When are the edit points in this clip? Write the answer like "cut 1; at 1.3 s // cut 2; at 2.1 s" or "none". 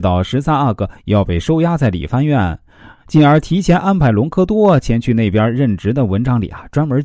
none